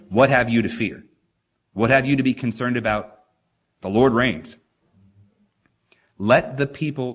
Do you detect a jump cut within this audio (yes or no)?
yes